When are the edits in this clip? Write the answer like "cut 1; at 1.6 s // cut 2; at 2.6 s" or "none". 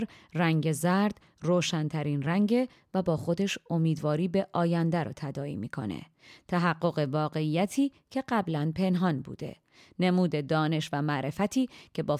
none